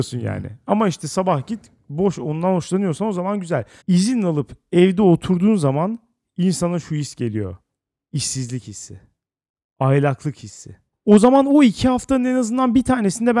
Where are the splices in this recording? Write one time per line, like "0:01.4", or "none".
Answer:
0:03.8
0:10.9